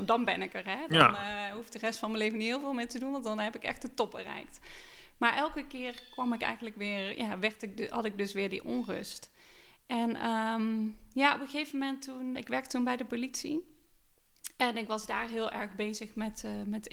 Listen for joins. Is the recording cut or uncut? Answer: cut